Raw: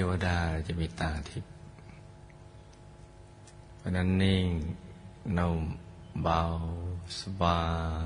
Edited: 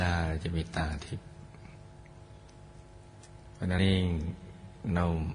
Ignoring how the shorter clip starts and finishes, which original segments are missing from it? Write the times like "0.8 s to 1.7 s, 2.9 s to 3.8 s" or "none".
4.0 s to 4.2 s

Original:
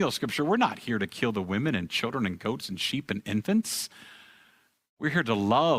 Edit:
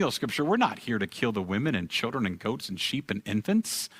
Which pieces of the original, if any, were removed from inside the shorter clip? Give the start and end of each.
none

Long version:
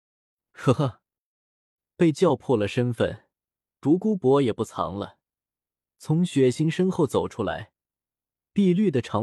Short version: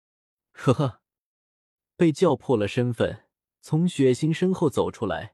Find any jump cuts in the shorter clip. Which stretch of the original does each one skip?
3.5 s to 5.9 s

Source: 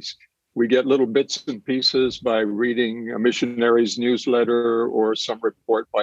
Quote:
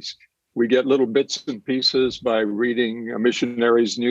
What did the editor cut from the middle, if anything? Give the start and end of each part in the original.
none

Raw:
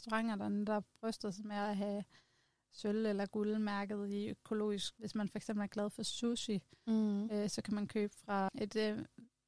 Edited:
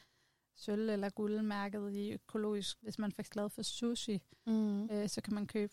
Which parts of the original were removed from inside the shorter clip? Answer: 5.4 s to 5.7 s

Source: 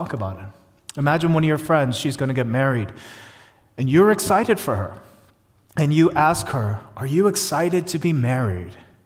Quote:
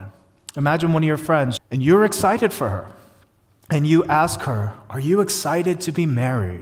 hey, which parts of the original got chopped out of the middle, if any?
2.0 s to 3.6 s

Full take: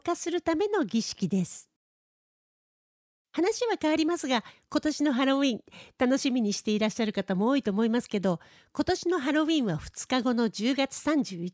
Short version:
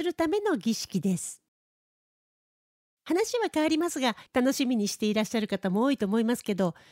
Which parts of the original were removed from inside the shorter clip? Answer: 4.5 s to 5.9 s

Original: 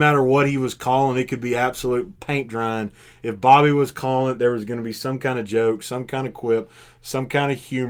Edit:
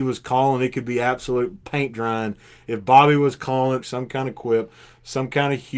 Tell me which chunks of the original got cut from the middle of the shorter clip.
4.4 s to 5.8 s

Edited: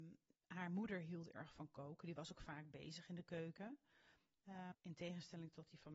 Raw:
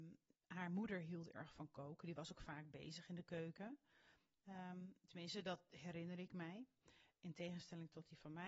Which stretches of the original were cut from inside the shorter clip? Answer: 4.7 s to 7.1 s

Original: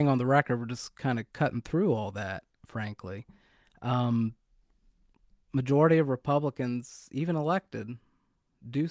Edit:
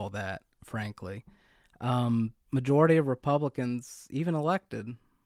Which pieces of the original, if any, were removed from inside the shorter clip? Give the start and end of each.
4.4 s to 5.4 s

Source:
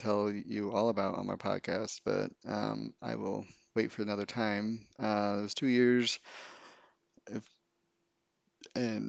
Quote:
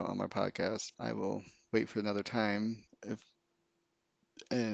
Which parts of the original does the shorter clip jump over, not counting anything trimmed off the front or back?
2.0 s to 3.0 s, 4.9 s to 7.1 s

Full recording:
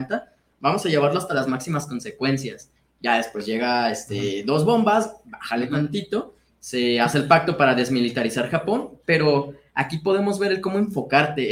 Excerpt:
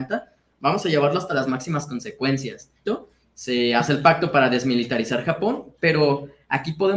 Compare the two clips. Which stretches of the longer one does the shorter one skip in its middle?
2.9 s to 6.1 s

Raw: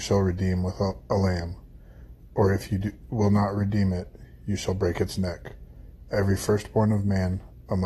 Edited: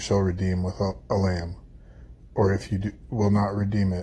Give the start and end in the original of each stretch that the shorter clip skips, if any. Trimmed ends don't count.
none

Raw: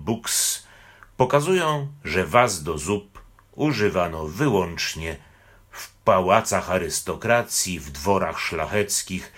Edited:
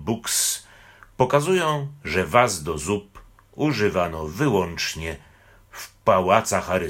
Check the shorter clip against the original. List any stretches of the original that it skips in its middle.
none

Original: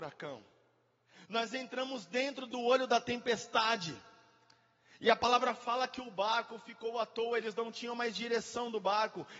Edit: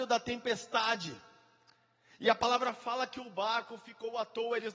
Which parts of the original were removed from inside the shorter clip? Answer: none

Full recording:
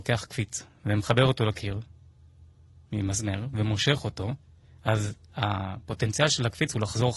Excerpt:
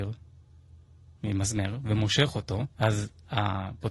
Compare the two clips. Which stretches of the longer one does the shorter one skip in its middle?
4.4 s to 4.8 s

